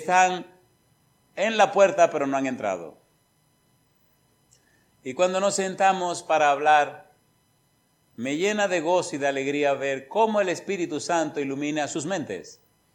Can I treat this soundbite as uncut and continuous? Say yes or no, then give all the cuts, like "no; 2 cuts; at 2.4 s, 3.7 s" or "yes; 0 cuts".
yes; 0 cuts